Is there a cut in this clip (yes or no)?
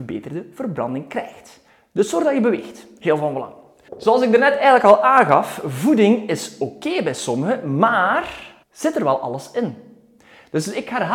yes